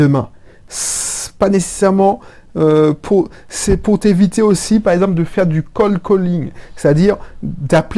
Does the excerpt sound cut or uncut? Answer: uncut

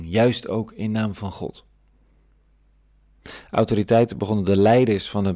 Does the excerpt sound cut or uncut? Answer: uncut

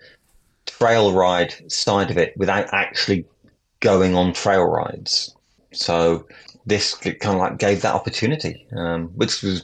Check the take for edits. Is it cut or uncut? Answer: uncut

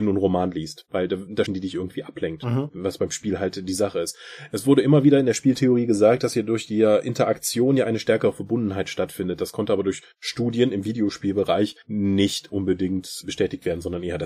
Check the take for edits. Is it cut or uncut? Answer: cut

